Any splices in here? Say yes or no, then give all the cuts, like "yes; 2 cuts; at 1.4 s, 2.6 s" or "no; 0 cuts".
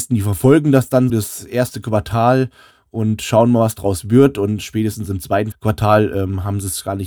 yes; 2 cuts; at 1.1 s, 5.5 s